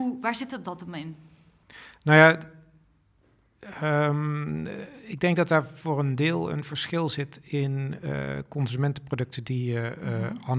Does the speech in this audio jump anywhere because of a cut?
no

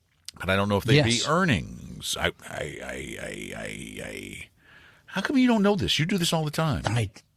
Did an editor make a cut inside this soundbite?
no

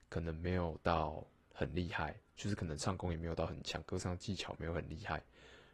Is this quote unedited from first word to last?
no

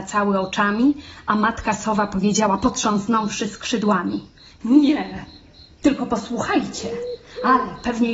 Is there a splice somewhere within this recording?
no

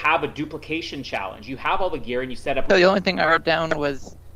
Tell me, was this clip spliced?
yes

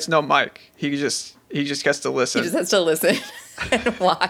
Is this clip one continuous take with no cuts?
yes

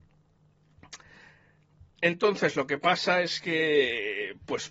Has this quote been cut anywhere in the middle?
no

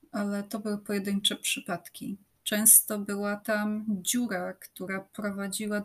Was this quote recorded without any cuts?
no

